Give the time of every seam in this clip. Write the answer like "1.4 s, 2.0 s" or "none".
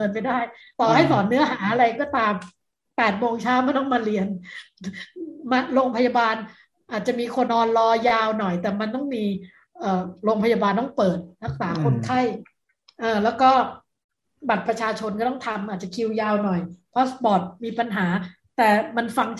7.5 s

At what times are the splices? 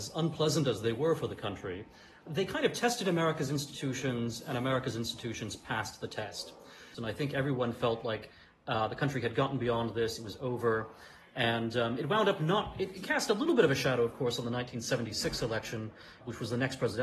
6.9 s

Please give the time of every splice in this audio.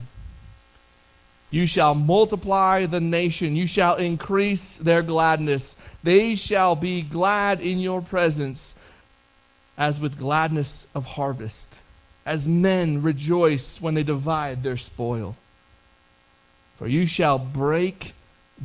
none

